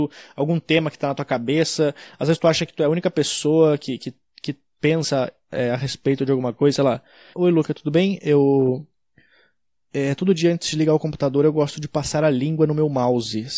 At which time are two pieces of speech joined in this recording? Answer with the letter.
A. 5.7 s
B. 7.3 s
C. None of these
B